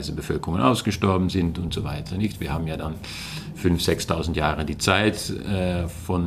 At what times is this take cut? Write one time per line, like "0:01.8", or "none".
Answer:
none